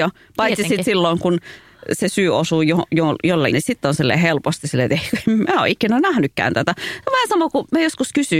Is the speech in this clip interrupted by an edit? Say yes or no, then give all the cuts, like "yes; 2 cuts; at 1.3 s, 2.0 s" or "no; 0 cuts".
yes; 1 cut; at 3.5 s